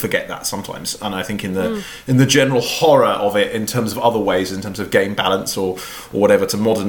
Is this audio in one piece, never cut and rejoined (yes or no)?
yes